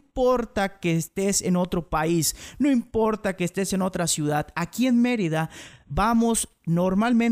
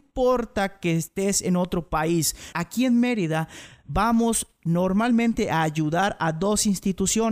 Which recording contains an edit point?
second; 1 cut; at 2.5 s

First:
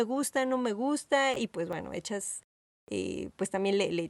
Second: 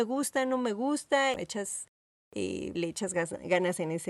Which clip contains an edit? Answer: second; 2 cuts; at 1.3 s, 2.7 s

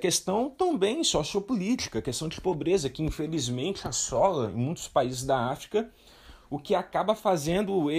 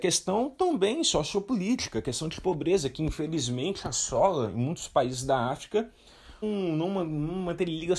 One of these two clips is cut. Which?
second; 1 cut; at 6.4 s

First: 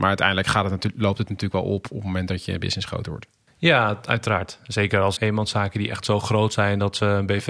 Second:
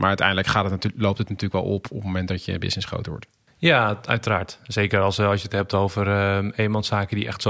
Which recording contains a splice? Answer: first; 1 cut; at 5.2 s

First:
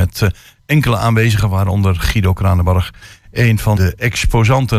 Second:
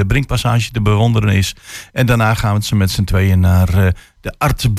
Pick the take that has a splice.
first; 1 cut; at 3.8 s

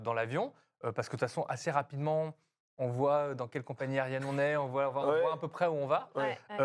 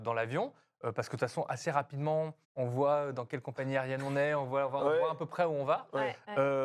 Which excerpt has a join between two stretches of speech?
second; 1 cut; at 2.4 s

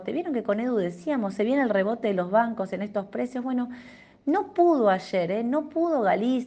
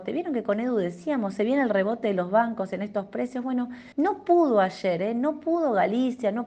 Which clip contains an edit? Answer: second; 1 cut; at 3.9 s

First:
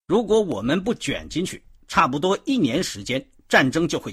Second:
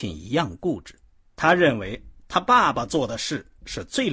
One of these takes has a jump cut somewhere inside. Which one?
second; 1 cut; at 1.3 s

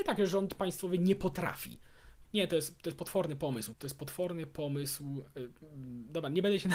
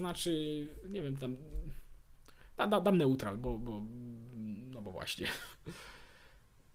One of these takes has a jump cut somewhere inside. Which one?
first; 2 cuts; at 2.2 s, 3.7 s

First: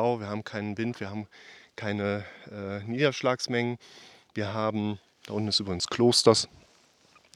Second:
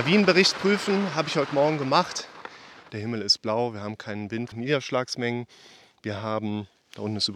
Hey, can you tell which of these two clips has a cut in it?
second; 2 cuts; at 2.9 s, 4.5 s

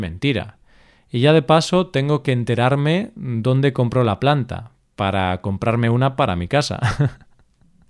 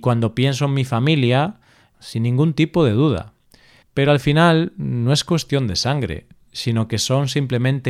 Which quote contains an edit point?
second; 2 cuts; at 1.9 s, 3.8 s

